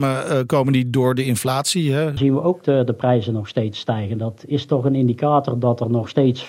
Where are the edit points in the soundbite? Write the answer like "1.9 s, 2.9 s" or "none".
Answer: 2.2 s